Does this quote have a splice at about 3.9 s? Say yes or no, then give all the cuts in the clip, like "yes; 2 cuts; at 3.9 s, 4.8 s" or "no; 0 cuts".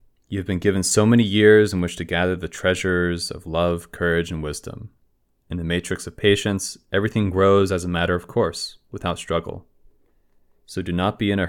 no; 0 cuts